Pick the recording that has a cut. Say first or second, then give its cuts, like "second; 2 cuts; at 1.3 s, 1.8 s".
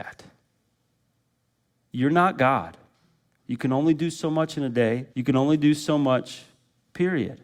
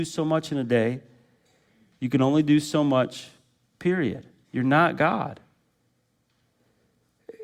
first; 2 cuts; at 3.4 s, 5.1 s